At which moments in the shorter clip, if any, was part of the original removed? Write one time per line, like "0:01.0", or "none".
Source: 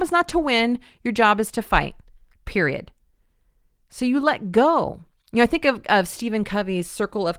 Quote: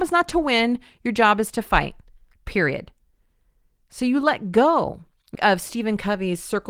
0:05.4